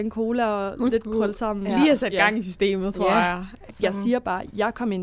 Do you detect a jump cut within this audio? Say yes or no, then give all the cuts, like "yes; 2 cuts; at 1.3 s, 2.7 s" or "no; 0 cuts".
yes; 1 cut; at 3.7 s